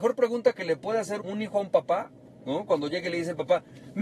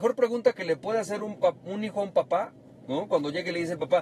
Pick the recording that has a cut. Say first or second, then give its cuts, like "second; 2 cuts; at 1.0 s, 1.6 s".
first; 1 cut; at 1.2 s